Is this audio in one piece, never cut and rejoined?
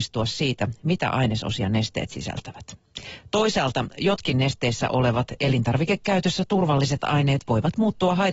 yes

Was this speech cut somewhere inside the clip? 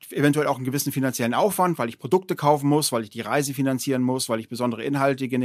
no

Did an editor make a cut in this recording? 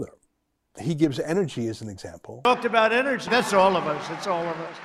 yes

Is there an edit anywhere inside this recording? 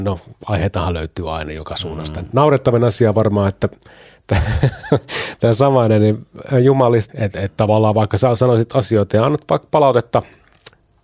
yes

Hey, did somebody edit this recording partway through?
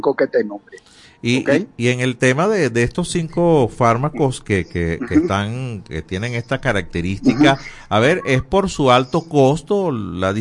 no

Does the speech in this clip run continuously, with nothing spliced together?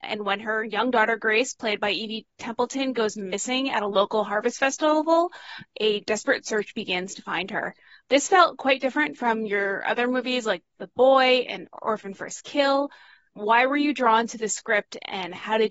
yes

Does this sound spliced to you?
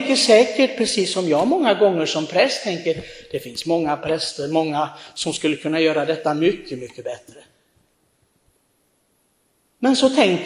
no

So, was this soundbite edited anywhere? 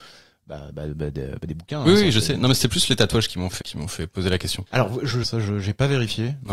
yes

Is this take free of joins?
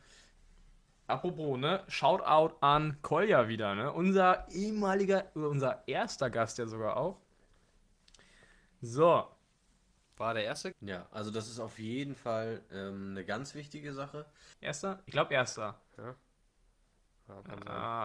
no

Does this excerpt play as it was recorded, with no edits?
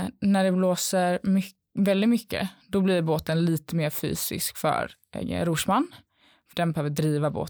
no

